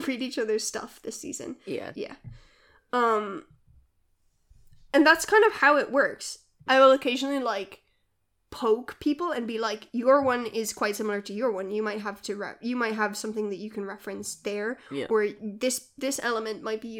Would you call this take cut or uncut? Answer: cut